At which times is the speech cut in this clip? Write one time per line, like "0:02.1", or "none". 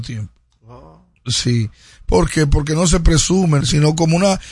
0:03.6

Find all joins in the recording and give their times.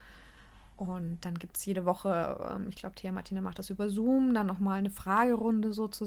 none

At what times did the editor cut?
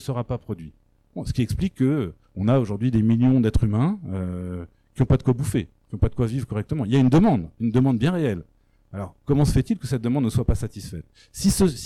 0:02.2

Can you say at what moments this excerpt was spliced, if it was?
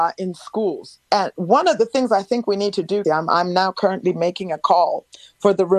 0:01.0
0:03.0

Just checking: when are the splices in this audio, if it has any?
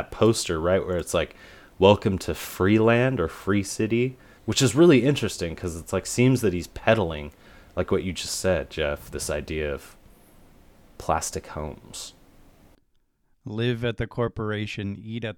0:04.4

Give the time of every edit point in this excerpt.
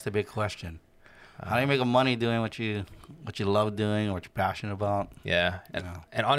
none

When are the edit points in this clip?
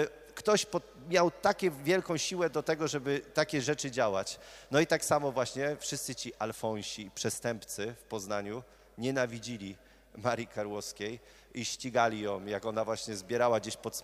none

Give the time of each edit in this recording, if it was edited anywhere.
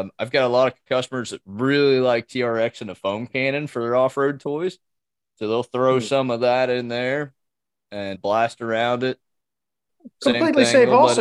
0:08.1

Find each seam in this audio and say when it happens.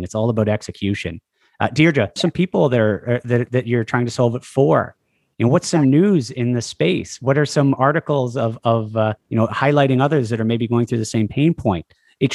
0:02.2
0:09.2

